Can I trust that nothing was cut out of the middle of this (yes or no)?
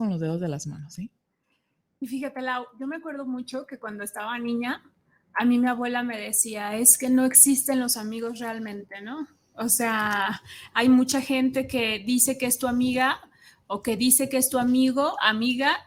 yes